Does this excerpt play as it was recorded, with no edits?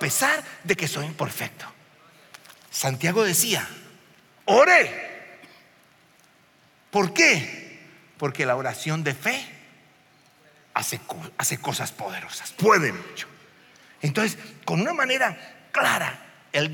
yes; 0 cuts

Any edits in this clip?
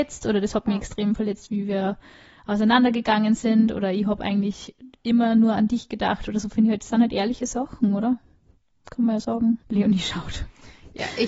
yes; 1 cut; at 9.6 s

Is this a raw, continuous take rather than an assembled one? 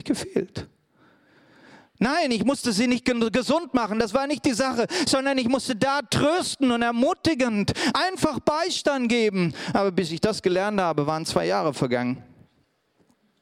yes; 0 cuts

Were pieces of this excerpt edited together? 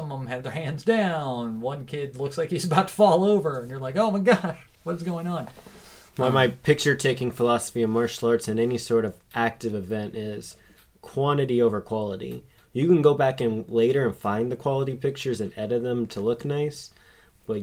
no; 0 cuts

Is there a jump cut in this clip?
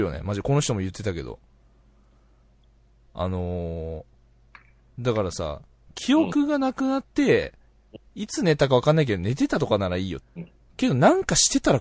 yes; 1 cut; at 10.2 s

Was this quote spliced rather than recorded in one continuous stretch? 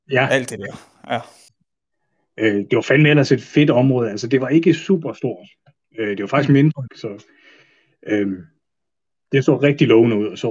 yes; 1 cut; at 6.9 s

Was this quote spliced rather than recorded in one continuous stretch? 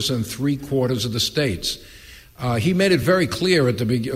no; 0 cuts

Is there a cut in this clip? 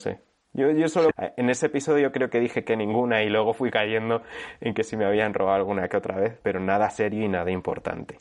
yes; 2 cuts; at 1.1 s, 6.4 s

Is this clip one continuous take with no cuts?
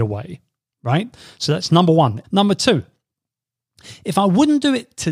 no; 1 cut; at 2.2 s

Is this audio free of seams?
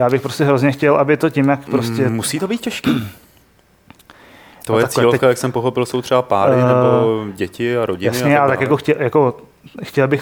yes; 0 cuts

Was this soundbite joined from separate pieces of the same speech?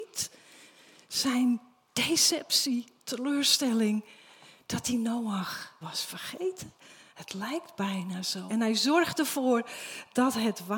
yes; 2 cuts; at 5.8 s, 8.5 s

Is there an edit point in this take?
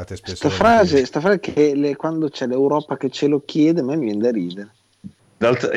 no; 0 cuts

